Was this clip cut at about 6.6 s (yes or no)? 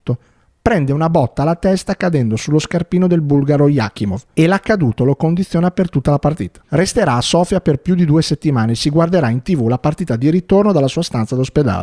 yes